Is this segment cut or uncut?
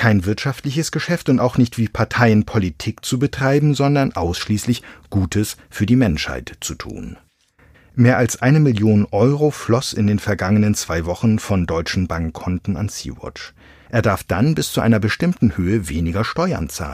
cut